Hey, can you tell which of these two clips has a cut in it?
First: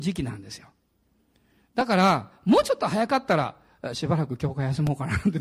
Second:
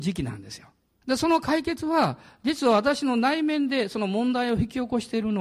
second; 1 cut; at 1.0 s

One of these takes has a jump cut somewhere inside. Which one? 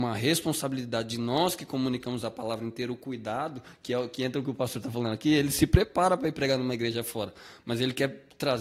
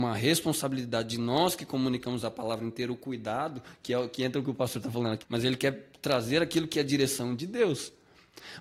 second; 1 cut; at 5.2 s

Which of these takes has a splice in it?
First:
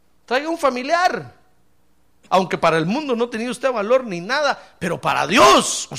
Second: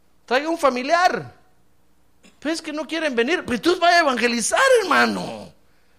first; 1 cut; at 2.3 s

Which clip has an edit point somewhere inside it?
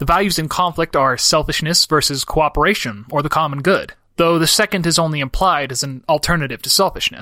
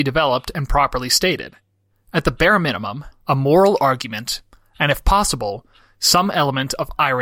second; 1 cut; at 3.1 s

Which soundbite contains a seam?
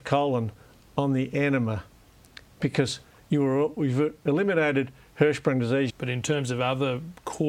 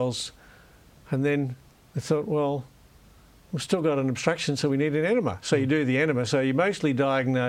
first; 1 cut; at 5.9 s

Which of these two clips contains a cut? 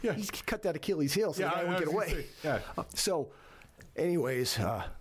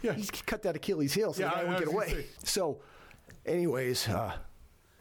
second; 1 cut; at 2.4 s

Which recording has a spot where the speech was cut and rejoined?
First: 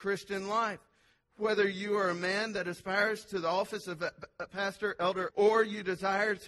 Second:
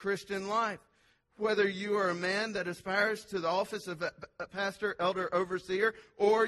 first; 1 cut; at 5.3 s

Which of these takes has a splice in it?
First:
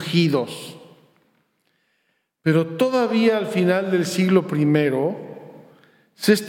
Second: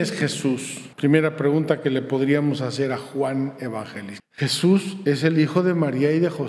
second; 2 cuts; at 0.9 s, 4.2 s

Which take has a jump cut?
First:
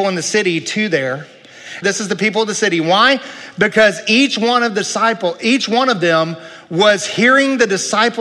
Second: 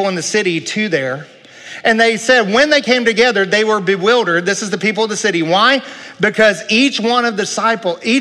first; 1 cut; at 1.8 s

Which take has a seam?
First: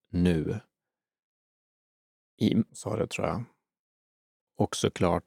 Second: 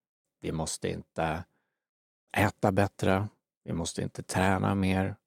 first; 1 cut; at 2.7 s

